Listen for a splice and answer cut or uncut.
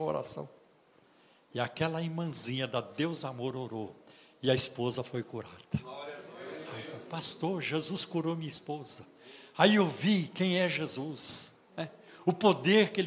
uncut